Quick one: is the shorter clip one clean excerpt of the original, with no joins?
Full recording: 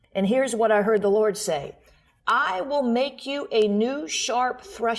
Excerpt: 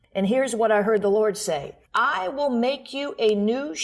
no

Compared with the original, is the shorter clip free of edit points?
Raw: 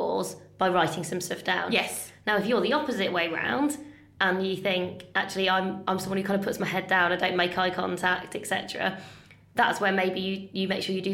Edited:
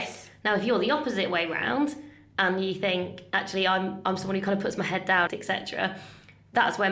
no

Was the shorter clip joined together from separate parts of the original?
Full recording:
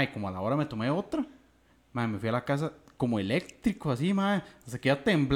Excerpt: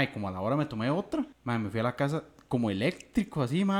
yes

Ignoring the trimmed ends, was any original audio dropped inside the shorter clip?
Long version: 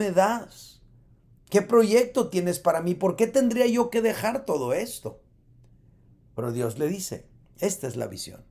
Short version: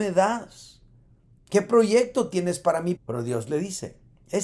yes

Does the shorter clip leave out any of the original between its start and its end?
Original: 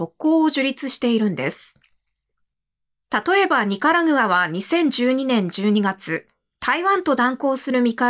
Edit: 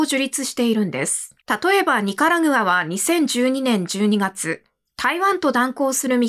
yes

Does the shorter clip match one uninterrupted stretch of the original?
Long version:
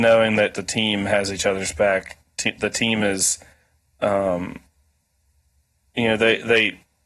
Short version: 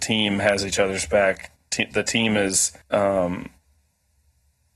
no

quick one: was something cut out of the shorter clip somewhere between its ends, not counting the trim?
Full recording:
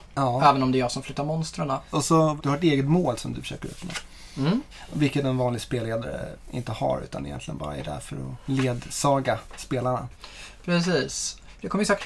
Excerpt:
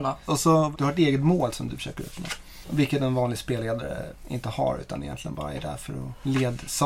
yes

